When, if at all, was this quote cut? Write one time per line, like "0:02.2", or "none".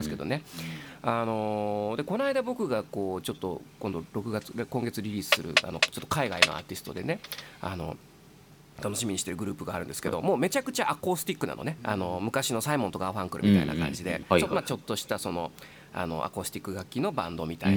0:11.8
0:14.3